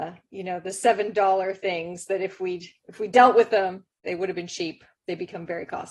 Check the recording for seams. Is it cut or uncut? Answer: cut